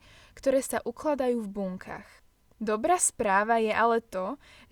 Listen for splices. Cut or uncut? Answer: cut